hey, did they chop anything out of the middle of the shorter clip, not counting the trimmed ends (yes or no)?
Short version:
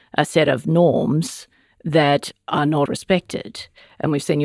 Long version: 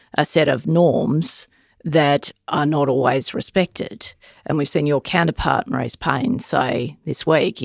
yes